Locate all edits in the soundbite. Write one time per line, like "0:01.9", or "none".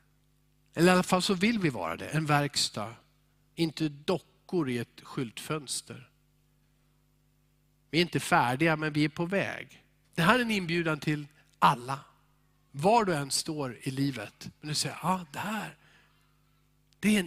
0:10.0

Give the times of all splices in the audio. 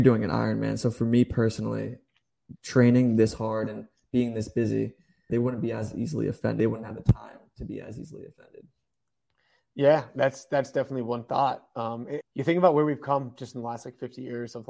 0:05.3
0:12.2

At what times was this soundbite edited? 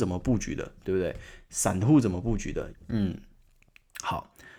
0:02.7

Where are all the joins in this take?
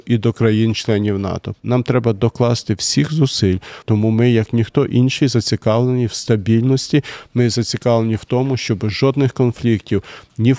0:01.6
0:03.8

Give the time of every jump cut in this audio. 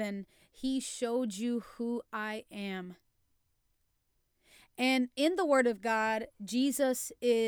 0:05.1

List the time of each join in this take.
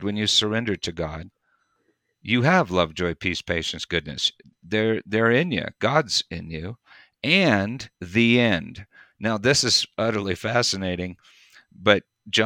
0:03.9
0:07.9

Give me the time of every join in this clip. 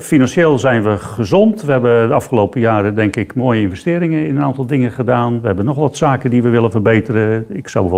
none

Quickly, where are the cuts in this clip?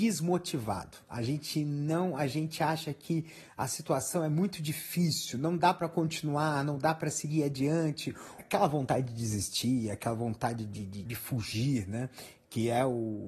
0:08.4
0:11.0

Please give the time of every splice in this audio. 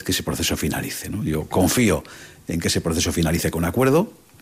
none

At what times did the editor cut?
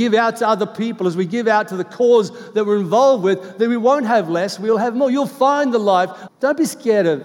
0:06.3

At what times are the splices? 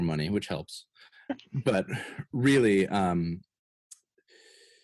none

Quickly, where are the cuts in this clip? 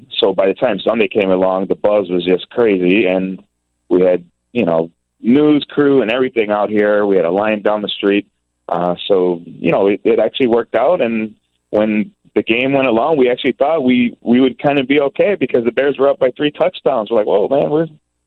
none

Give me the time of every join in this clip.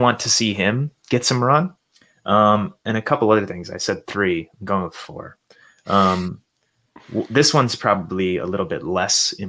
none

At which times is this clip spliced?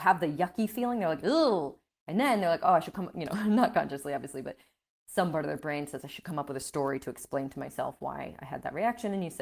none

